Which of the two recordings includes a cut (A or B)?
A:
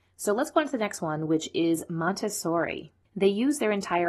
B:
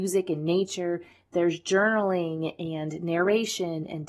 A